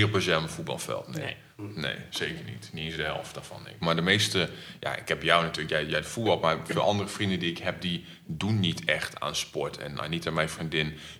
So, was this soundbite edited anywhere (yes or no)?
yes